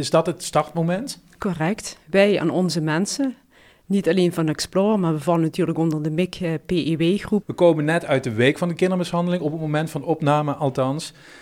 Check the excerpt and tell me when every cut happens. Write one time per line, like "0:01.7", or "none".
0:07.4

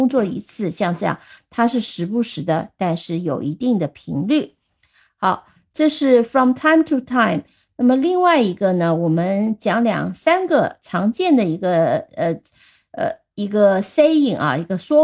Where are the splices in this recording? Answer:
0:02.8

